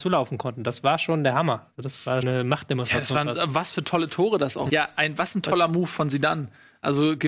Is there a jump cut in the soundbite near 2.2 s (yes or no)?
yes